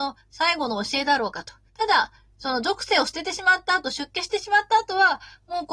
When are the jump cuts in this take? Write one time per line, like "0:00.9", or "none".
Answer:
0:01.7

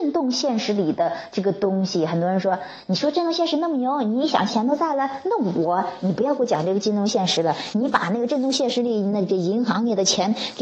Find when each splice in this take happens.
0:04.5
0:07.7

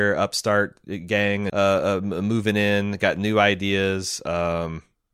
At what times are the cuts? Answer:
0:01.5

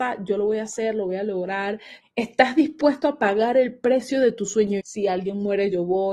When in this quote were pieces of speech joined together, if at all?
0:02.0
0:04.8

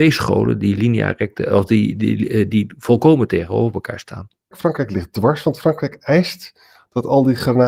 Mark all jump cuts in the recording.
0:04.5

